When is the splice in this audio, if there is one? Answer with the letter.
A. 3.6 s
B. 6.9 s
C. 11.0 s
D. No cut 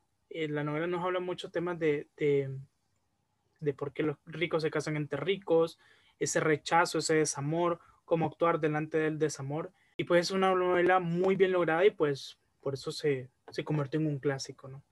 A